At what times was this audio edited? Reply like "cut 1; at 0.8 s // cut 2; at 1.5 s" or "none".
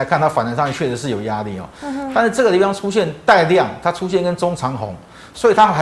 none